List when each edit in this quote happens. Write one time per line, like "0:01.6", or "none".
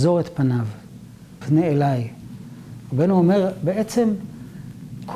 0:01.4